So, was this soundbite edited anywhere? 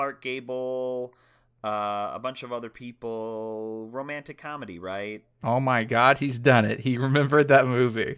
no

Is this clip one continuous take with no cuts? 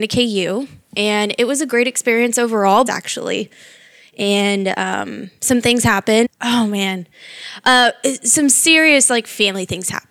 no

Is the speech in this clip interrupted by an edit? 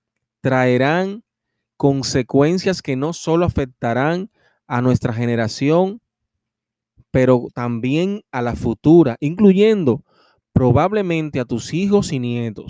no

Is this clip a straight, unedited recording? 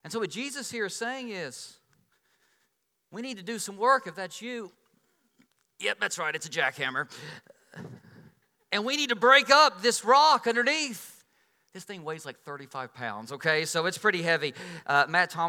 yes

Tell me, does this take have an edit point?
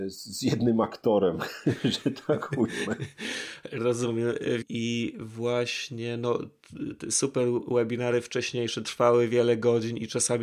yes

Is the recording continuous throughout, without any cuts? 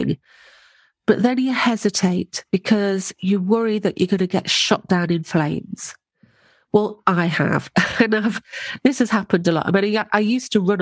yes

